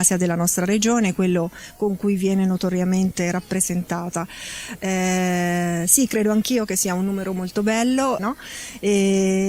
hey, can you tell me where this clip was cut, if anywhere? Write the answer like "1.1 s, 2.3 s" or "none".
4.8 s, 8.2 s